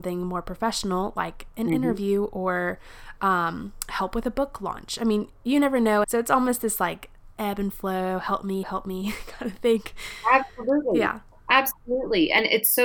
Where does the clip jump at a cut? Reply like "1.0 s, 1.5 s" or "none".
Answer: 6.0 s, 8.6 s